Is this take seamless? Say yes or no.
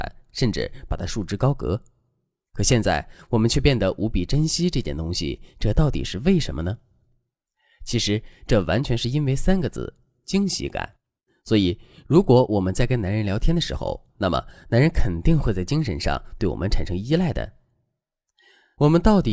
no